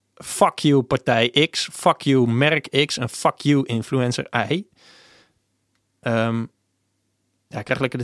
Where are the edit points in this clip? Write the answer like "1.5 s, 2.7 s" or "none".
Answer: none

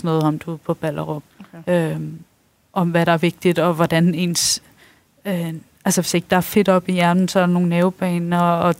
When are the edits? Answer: 1.3 s

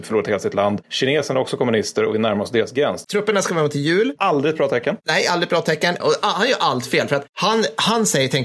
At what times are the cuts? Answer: 3.0 s, 6.0 s

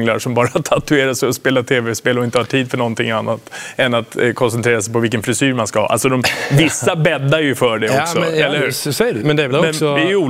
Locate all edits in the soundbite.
9.2 s

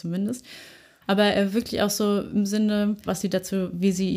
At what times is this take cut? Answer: 1.0 s, 3.1 s

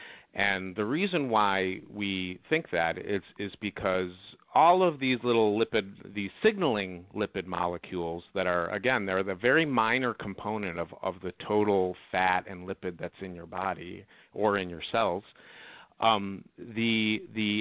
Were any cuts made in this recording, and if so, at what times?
none

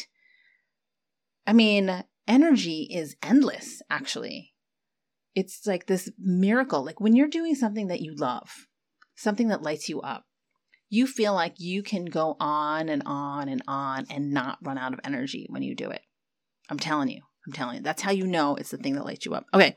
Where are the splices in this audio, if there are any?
none

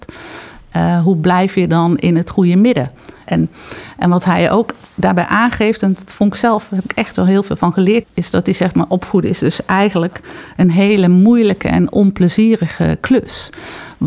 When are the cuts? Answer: 3.3 s, 8.0 s

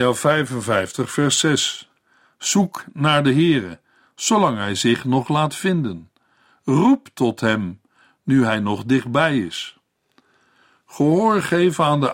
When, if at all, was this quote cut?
none

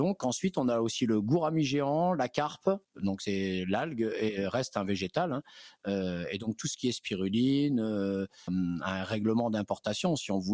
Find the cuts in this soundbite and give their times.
2.8 s, 8.5 s

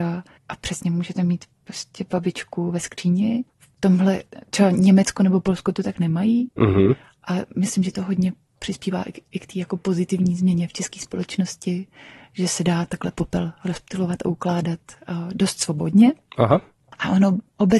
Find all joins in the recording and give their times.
3.5 s

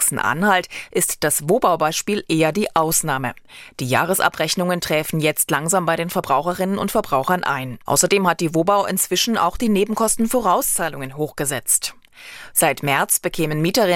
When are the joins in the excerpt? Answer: 7.9 s, 12.5 s

